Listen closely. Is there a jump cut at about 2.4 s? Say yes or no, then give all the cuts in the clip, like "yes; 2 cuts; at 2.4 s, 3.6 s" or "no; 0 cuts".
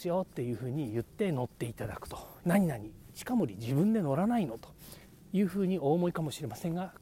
yes; 1 cut; at 2.4 s